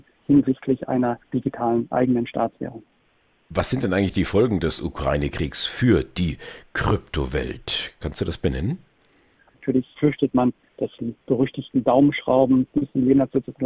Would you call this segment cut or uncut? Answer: cut